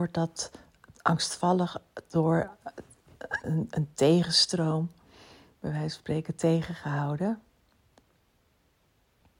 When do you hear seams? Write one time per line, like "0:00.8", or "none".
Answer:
0:03.4